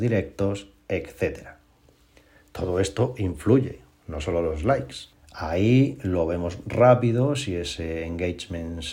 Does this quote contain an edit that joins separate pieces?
yes; 1 cut; at 5.1 s

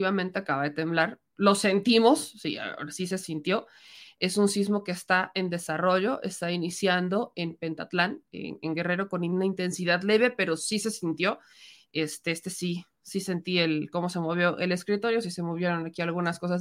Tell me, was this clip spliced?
no; 0 cuts

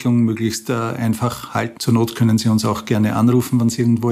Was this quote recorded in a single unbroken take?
no; 1 cut; at 1.8 s

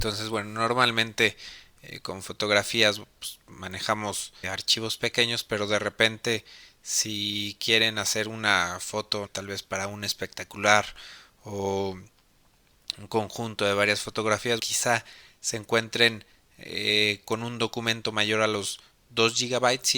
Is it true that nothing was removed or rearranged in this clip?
no; 3 cuts; at 4.4 s, 9.3 s, 14.6 s

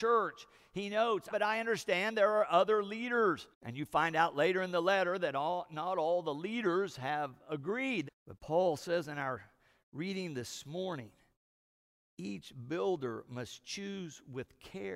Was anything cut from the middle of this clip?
yes; 3 cuts; at 1.3 s, 3.5 s, 8.1 s

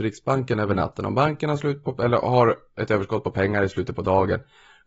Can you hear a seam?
no; 0 cuts

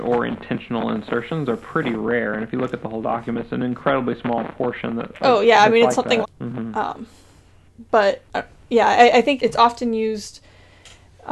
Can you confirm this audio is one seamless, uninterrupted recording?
no; 3 cuts; at 6.2 s, 8.3 s, 9.4 s

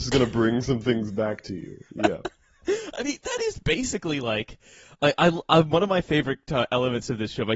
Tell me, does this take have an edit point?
no; 0 cuts

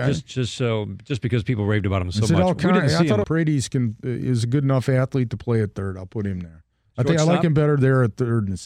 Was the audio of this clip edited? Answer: yes; 1 cut; at 3.2 s

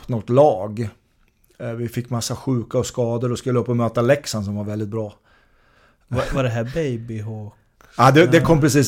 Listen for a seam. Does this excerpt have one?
no; 0 cuts

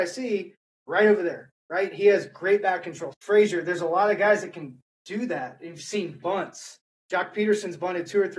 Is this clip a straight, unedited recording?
no; 1 cut; at 3.1 s

